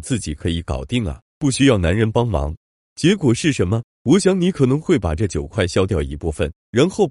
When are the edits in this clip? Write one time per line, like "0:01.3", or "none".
0:03.9